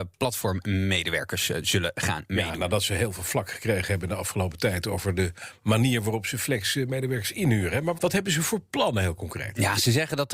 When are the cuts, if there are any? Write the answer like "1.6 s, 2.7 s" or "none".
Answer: 8.0 s